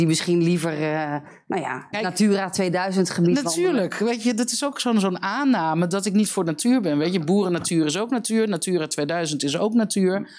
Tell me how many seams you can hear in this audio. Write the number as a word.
one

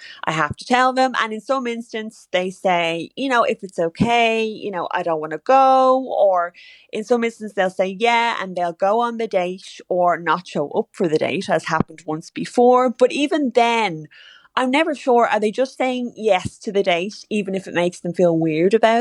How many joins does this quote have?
zero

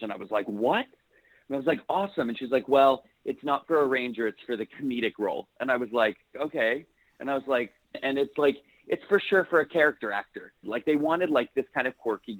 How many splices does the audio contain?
three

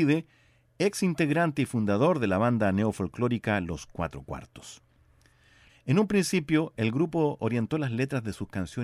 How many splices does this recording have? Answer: one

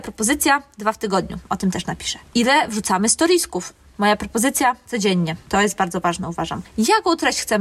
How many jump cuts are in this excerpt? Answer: zero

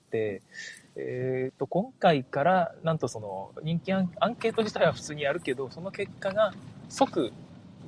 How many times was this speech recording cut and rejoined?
zero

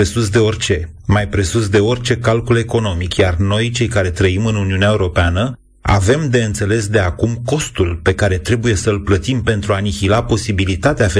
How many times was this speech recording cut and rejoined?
zero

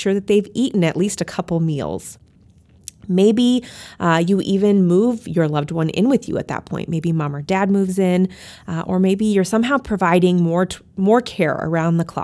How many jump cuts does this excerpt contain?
zero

